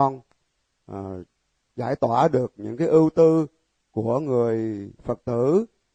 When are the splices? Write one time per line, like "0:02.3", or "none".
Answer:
none